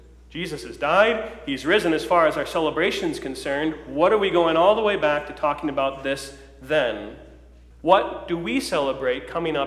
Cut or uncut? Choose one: cut